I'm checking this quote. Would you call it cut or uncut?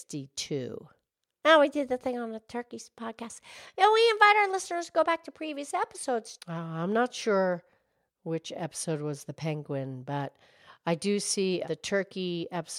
cut